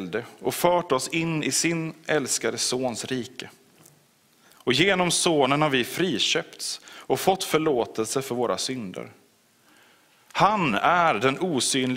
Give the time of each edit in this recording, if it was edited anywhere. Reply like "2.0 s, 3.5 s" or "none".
none